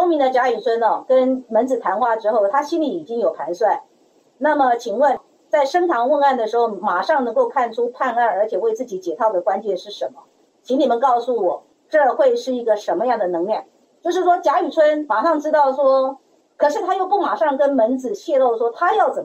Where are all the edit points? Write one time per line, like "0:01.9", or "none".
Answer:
0:16.4